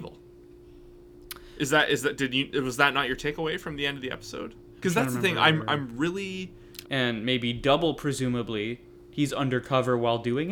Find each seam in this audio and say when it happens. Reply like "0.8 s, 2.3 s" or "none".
6.8 s